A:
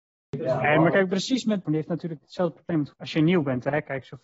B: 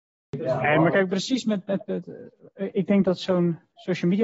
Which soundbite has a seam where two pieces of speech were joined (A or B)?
A